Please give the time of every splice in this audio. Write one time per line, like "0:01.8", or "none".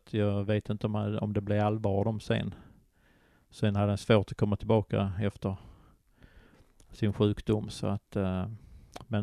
none